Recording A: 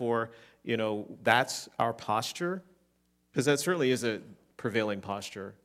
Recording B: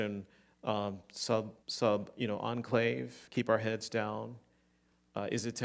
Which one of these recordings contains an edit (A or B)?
B